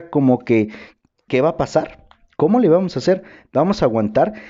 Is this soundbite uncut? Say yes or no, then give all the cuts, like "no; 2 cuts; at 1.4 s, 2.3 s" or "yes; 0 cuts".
no; 1 cut; at 1.3 s